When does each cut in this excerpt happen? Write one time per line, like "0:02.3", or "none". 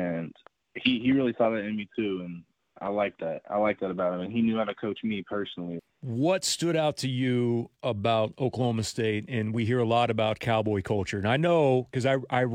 0:05.8

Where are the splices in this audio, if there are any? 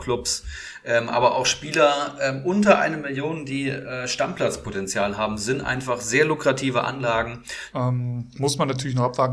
0:07.7

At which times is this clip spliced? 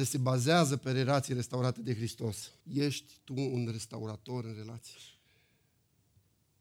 0:02.6

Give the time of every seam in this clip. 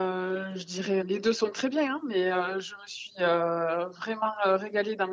0:01.0

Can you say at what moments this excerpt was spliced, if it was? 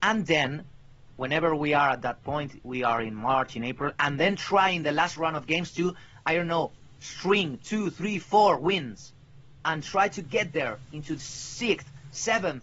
none

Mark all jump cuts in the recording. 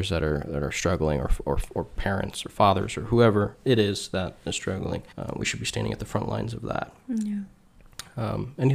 0:05.1

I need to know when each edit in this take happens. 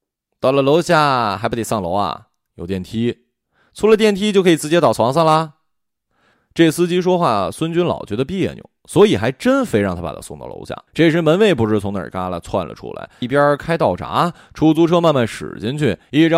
0:10.9
0:13.2

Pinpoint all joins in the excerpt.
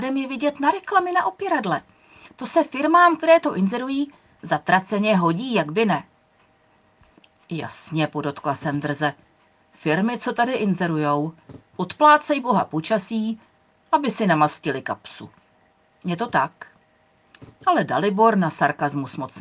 none

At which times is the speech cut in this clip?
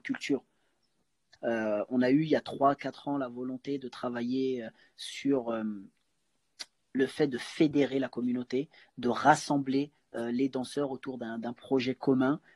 0:01.4

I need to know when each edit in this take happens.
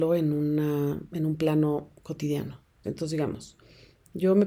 0:02.8

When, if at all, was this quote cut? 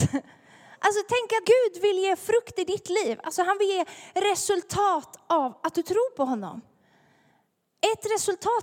0:01.4

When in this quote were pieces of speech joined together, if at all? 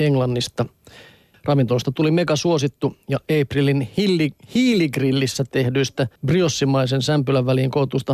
0:01.3
0:06.2

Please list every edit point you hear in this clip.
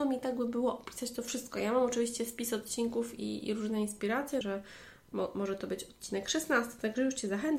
0:04.4

